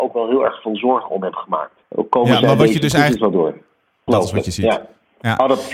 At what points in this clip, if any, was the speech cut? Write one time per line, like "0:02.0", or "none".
0:01.8
0:04.1